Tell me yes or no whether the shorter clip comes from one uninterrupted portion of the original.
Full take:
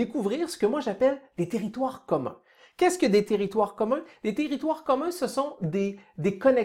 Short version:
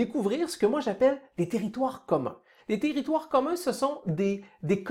no